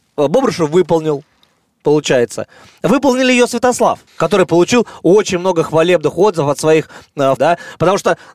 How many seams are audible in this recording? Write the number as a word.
two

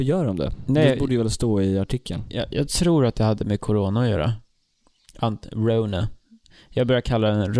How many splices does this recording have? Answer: zero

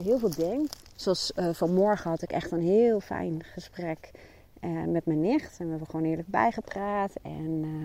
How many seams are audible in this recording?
one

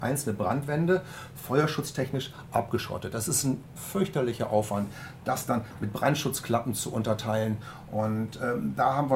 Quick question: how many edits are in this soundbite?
zero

